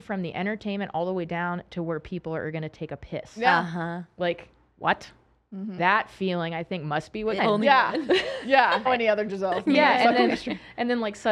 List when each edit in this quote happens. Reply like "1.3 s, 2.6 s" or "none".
5.8 s, 7.4 s, 8.9 s